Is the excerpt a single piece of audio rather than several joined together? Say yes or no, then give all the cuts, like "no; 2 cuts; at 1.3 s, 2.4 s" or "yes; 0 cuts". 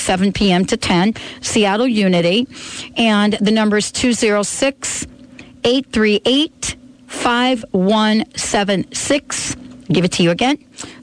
yes; 0 cuts